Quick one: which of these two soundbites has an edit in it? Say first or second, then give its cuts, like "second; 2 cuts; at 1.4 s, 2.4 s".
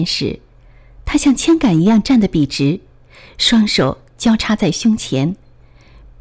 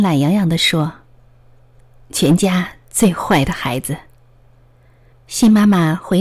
second; 1 cut; at 5.1 s